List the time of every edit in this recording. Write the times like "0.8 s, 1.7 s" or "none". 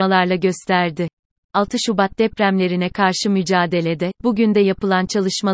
1.5 s, 4.2 s